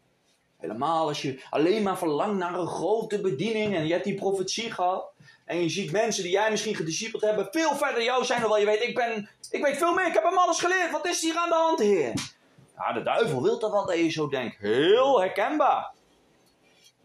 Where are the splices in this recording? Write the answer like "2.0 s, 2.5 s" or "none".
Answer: none